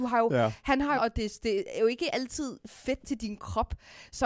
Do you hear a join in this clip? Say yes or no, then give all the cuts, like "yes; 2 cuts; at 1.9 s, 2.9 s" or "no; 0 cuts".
yes; 1 cut; at 1.0 s